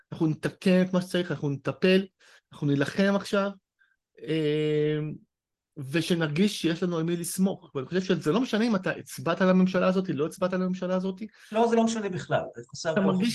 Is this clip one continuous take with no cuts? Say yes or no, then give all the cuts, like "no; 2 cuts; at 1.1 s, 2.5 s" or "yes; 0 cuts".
yes; 0 cuts